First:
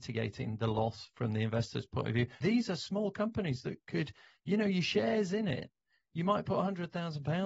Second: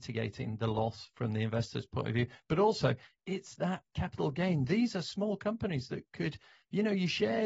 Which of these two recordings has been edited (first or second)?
first